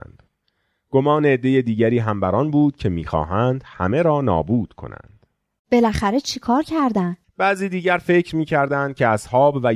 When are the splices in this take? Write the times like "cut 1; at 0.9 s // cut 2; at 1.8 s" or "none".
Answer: cut 1; at 7.2 s